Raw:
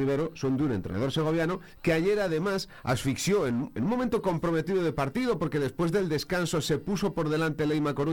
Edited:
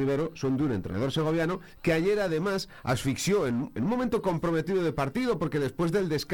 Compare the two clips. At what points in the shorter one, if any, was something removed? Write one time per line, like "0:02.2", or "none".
none